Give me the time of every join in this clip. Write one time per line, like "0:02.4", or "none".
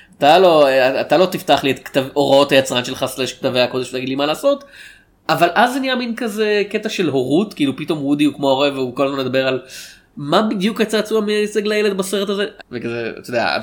0:10.1
0:12.6